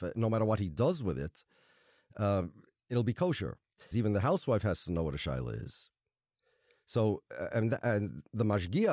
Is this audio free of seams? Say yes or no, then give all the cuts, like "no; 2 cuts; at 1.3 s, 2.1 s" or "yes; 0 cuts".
no; 1 cut; at 3.9 s